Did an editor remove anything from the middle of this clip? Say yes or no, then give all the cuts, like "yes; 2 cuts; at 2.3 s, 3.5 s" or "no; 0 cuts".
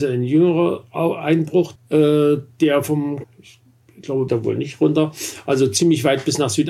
yes; 3 cuts; at 1.8 s, 3.2 s, 4.3 s